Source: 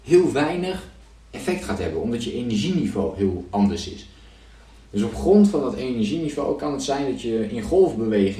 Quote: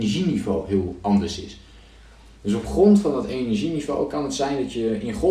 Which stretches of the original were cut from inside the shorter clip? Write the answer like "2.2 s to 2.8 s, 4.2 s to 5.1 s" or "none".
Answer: none